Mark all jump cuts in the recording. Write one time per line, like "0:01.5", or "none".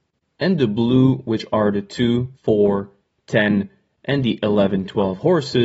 0:02.4